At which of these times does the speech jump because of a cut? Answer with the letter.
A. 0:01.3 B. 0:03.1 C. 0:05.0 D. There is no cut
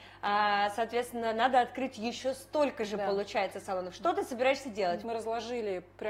C